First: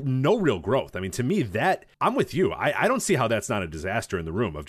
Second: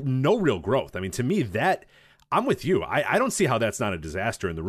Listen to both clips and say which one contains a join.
first; 1 cut; at 1.9 s

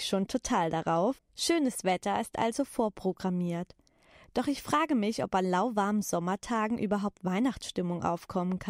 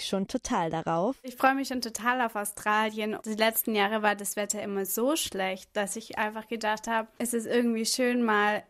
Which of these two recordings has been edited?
first; 1 cut; at 1.2 s

